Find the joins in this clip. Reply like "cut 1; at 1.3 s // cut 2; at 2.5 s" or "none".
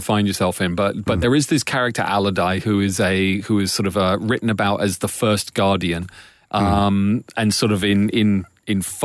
none